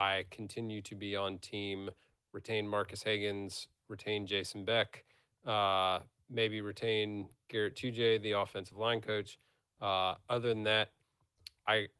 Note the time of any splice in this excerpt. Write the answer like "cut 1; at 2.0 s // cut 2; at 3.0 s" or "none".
none